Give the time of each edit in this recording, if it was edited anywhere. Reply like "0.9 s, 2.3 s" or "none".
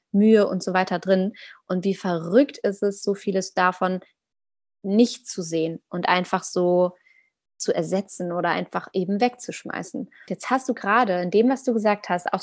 10.3 s